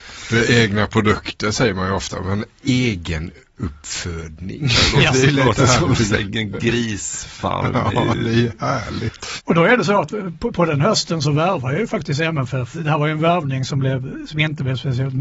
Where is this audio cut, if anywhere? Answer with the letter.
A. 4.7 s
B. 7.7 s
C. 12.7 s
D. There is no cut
D